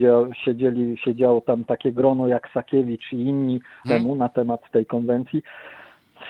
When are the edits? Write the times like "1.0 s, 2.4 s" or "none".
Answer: 3.8 s